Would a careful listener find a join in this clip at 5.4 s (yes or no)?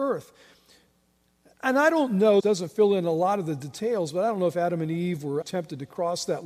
yes